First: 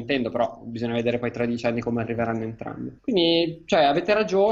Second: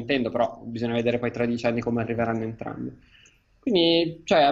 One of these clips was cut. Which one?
first; 1 cut; at 3.0 s

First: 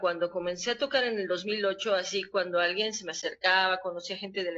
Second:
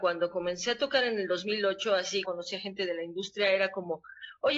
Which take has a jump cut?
second; 1 cut; at 2.2 s

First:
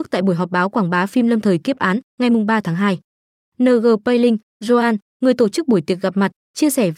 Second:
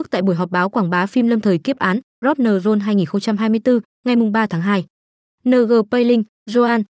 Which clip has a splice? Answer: first; 1 cut; at 2.1 s

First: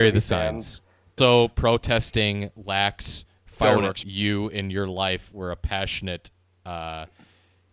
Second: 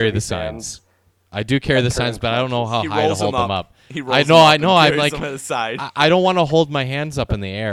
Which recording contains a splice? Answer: first; 2 cuts; at 1.2 s, 4.0 s

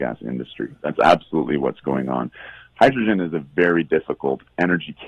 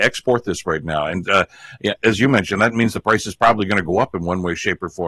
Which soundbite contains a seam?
second; 1 cut; at 2.0 s

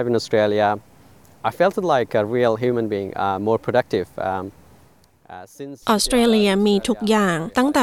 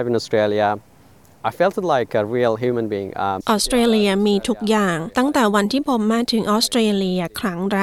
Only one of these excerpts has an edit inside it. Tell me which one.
second; 1 cut; at 3.4 s

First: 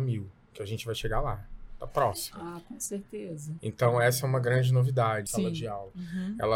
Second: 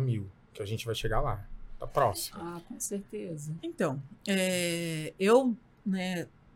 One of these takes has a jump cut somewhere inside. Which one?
first; 2 cuts; at 3.6 s, 5.3 s

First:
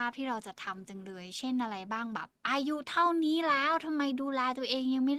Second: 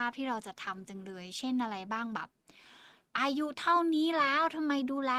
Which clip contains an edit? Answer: first; 1 cut; at 2.4 s

